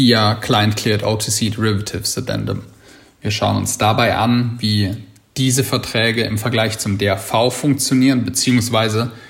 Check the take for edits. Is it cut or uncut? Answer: uncut